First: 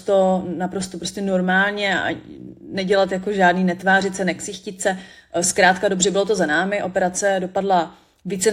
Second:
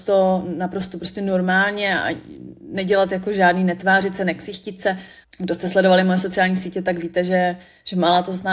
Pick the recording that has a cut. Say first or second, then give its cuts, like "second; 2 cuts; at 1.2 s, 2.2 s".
second; 1 cut; at 5.2 s